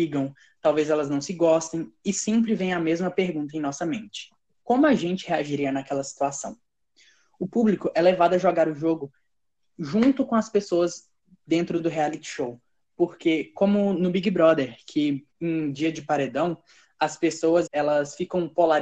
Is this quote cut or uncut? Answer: cut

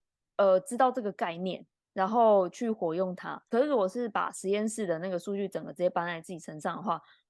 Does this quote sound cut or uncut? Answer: uncut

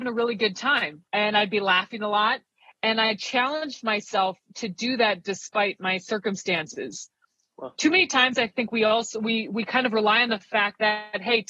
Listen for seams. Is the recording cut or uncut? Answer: cut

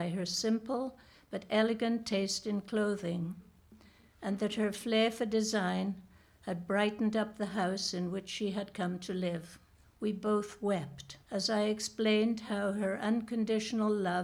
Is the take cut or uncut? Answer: cut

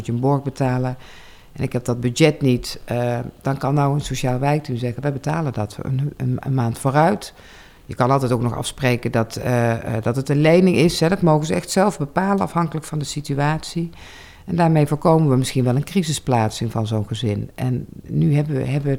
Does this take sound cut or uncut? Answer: uncut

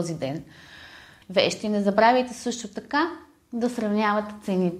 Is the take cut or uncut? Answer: cut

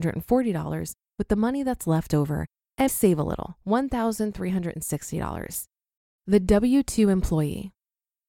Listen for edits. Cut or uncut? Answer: cut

